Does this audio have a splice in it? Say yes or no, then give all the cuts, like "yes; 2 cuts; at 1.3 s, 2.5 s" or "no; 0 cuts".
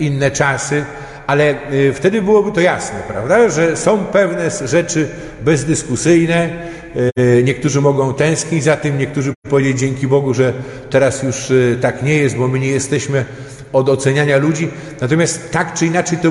no; 0 cuts